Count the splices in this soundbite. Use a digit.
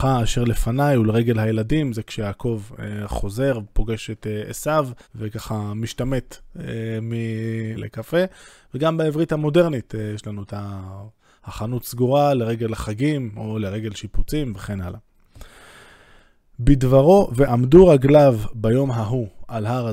2